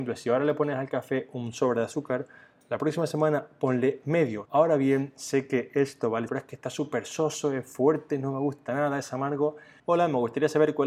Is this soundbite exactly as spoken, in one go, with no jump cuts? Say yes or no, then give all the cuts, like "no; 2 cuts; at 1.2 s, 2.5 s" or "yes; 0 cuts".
no; 3 cuts; at 4.5 s, 6.3 s, 9.8 s